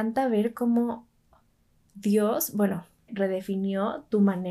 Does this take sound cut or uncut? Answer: cut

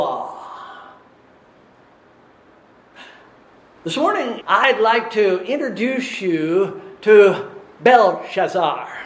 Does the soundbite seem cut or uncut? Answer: cut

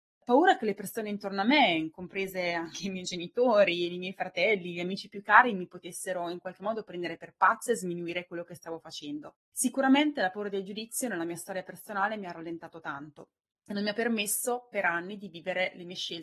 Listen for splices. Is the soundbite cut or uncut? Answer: cut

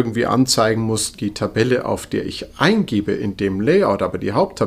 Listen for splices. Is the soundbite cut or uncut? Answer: cut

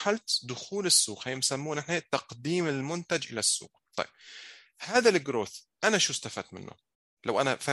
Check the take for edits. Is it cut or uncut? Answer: uncut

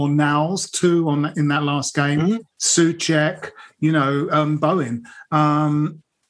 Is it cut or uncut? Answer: uncut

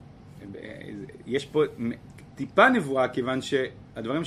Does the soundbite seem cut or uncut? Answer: uncut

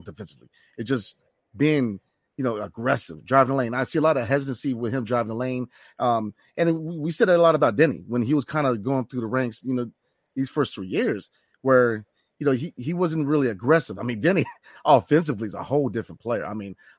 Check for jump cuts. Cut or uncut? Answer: cut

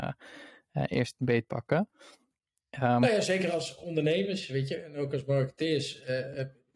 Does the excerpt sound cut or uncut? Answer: cut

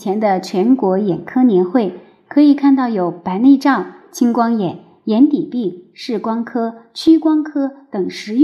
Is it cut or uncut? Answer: uncut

